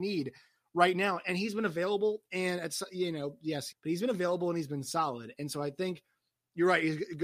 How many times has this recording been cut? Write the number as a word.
one